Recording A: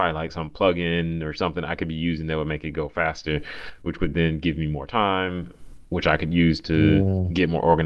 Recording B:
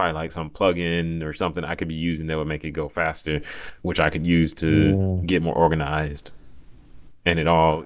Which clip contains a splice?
B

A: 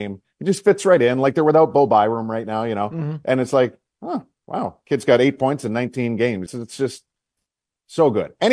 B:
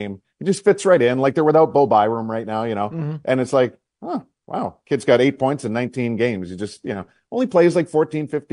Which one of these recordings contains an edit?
A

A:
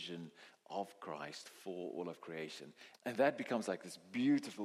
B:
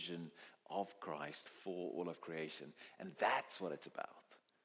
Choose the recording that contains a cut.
A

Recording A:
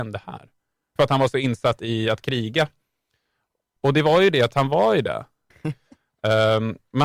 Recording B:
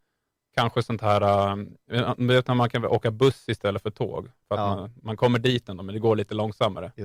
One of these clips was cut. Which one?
A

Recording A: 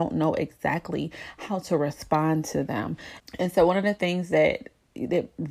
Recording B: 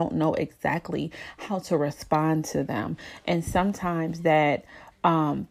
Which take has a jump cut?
A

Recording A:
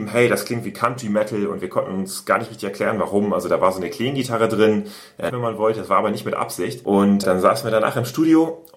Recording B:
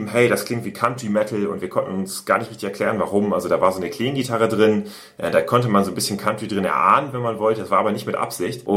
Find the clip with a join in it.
A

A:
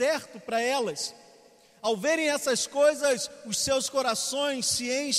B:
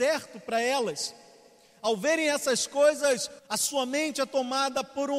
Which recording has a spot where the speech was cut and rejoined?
B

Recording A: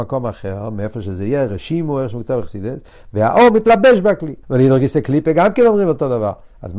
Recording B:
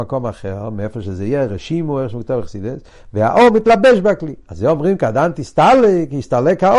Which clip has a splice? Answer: A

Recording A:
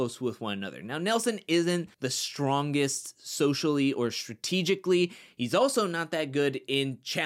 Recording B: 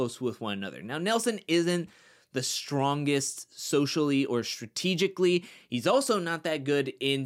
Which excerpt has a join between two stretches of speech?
A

